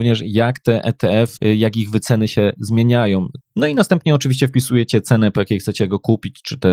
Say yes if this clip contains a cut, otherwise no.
yes